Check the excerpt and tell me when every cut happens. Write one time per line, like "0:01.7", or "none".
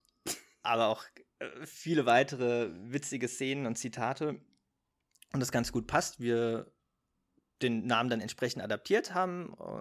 none